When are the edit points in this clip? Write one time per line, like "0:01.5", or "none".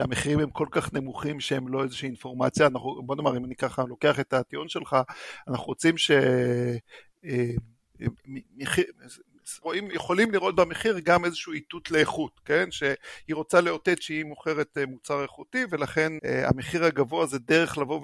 0:09.6
0:16.2